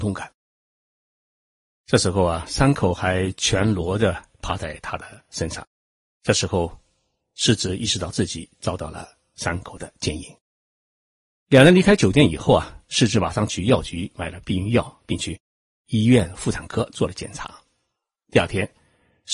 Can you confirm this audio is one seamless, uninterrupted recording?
yes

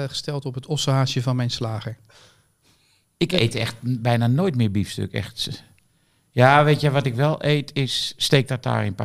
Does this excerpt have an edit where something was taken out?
no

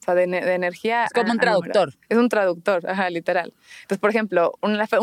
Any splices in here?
no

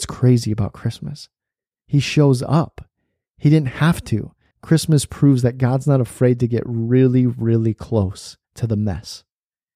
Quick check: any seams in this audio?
yes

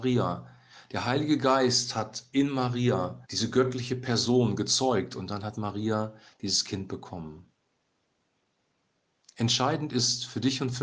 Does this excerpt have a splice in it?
yes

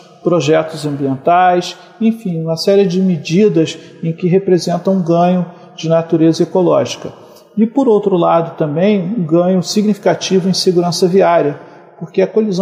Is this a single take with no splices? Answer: yes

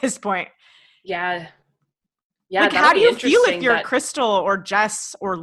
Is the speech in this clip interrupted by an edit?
no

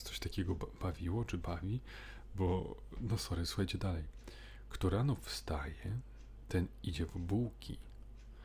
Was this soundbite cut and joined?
yes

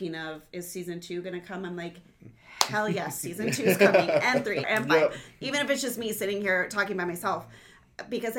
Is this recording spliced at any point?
yes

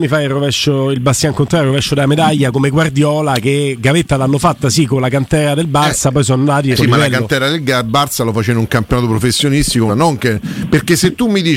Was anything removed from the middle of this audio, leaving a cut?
yes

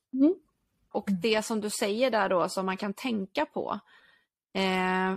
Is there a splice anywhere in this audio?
yes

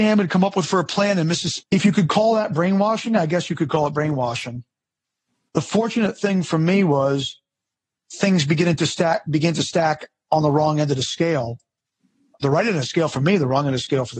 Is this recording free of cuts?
no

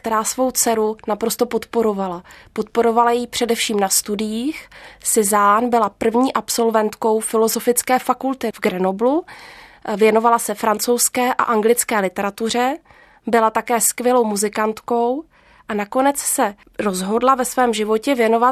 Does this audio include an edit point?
no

